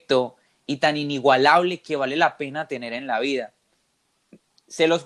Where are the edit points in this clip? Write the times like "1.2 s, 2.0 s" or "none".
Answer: none

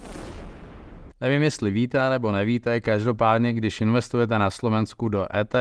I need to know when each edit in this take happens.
1.1 s

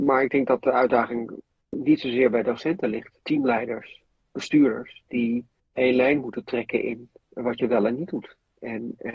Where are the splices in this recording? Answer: 3.2 s

